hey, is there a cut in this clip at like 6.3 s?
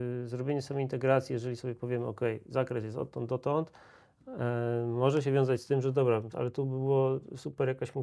yes; 1 cut; at 6.3 s

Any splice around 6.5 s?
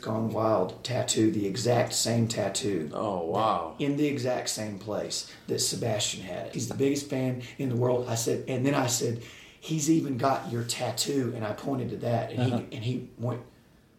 yes; 1 cut; at 6.5 s

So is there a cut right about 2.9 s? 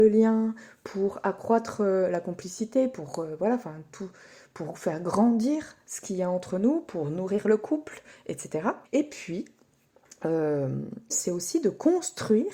no; 2 cuts; at 8.9 s, 11.1 s

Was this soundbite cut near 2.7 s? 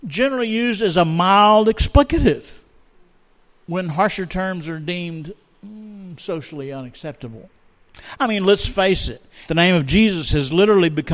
no; 1 cut; at 9.4 s

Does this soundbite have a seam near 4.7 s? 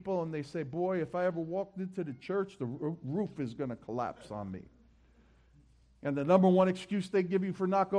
no; 0 cuts

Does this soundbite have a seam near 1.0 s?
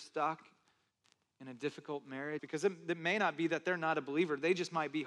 no; 1 cut; at 2.4 s

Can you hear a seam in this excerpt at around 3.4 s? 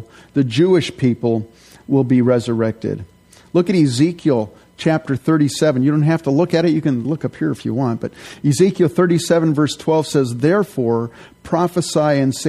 no; 1 cut; at 7.0 s

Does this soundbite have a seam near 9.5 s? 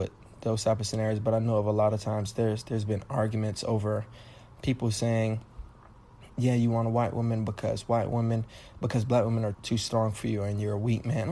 yes; 2 cuts; at 6.3 s, 9.5 s

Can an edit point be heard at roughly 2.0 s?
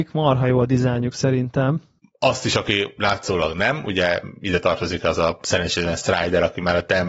yes; 1 cut; at 2.0 s

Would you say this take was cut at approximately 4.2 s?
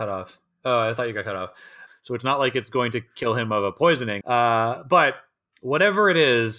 yes; 2 cuts; at 1.9 s, 4.2 s

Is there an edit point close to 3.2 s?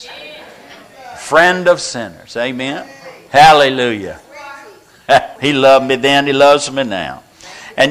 no; 1 cut; at 5.4 s

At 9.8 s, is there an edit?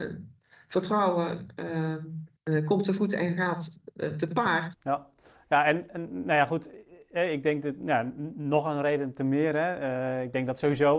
no; 2 cuts; at 2.3 s, 4.7 s

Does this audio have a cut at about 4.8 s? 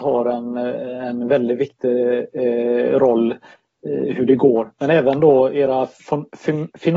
no; 0 cuts

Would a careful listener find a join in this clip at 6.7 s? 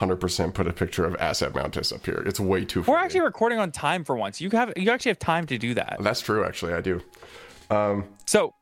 no; 0 cuts

